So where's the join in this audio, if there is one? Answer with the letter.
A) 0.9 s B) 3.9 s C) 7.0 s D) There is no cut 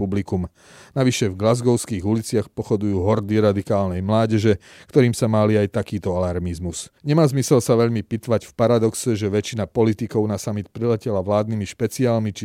C